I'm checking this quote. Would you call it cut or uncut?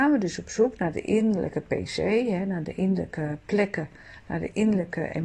uncut